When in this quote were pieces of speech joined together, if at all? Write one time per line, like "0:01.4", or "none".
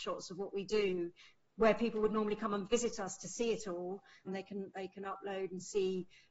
0:04.3

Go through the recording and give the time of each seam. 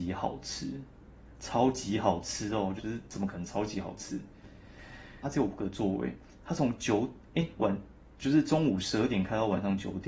0:02.8
0:05.2

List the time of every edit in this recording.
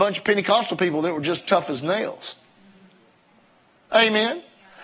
none

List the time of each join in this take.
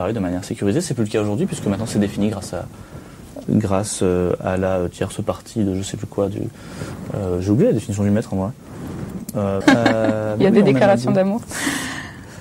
0:03.4
0:09.6

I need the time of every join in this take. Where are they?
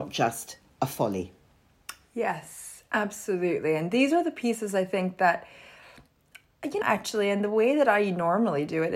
0:06.8

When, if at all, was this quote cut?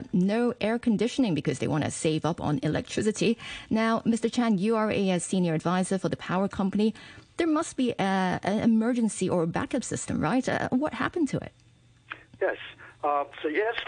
none

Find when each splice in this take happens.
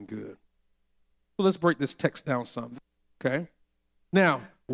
0:03.0

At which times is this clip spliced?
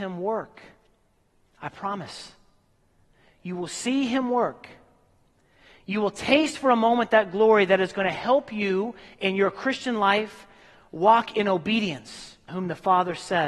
0:12.5

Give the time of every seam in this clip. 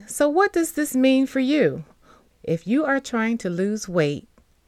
0:02.3

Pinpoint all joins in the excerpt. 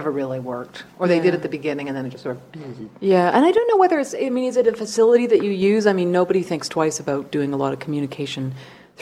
0:00.9

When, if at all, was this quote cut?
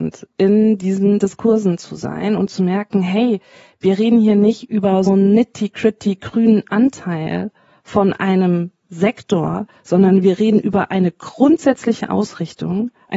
0:05.1

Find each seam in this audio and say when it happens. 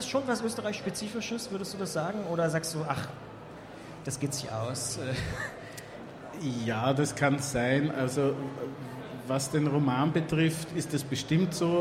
none

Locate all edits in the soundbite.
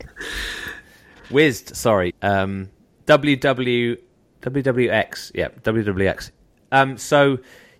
0:02.1

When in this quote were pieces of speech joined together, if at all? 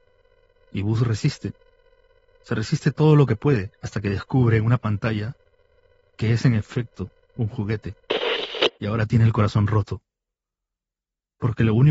0:03.7
0:08.7

